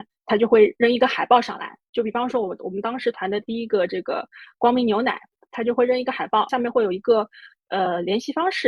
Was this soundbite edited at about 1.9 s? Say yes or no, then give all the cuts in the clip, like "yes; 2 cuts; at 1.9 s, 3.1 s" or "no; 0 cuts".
no; 1 cut; at 6.5 s